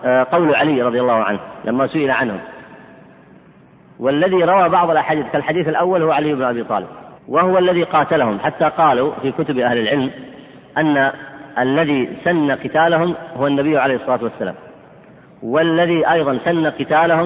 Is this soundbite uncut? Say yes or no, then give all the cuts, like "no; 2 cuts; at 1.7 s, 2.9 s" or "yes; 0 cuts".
no; 1 cut; at 7.2 s